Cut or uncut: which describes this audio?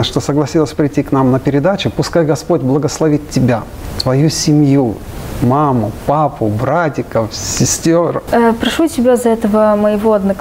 cut